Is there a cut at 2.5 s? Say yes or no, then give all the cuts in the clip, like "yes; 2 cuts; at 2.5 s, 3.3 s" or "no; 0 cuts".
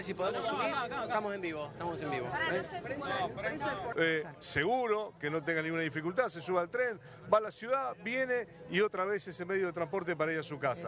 no; 1 cut; at 3.9 s